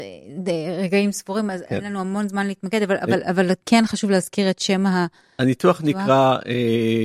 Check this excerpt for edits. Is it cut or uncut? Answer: uncut